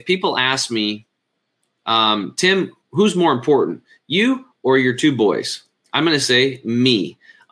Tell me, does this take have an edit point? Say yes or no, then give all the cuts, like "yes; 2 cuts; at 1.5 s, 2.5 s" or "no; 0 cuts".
no; 0 cuts